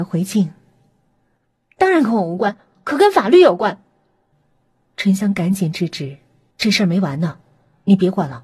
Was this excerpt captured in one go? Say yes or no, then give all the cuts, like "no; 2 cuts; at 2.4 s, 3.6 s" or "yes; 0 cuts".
no; 2 cuts; at 4.3 s, 6.5 s